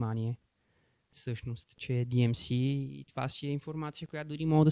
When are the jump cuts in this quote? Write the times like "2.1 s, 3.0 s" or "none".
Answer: 1.8 s